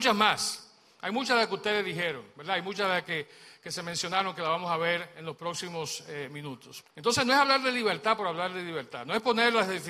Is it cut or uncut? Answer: cut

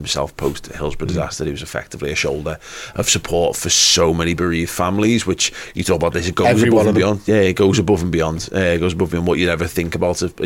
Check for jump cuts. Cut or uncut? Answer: uncut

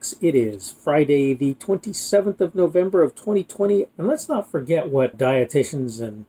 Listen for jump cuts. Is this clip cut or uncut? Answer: cut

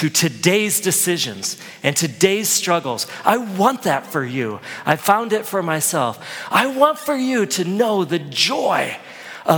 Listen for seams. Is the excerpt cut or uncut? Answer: uncut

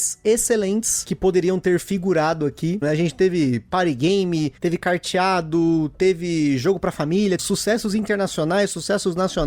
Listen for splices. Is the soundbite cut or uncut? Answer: cut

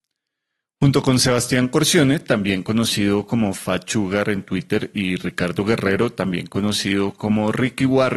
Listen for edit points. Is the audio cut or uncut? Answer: uncut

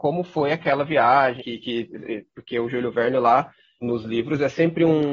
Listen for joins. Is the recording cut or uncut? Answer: cut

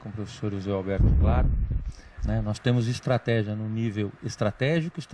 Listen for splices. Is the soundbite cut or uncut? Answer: cut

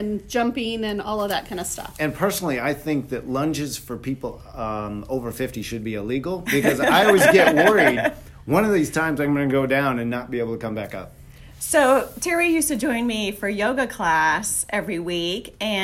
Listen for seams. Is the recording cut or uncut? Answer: uncut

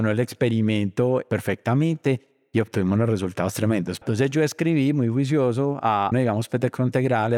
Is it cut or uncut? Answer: cut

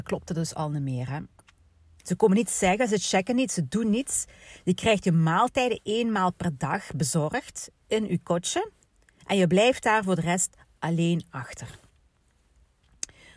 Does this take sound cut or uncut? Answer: cut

